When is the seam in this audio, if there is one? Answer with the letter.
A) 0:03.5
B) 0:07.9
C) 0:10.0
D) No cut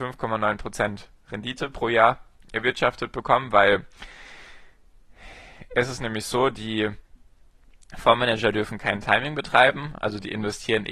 D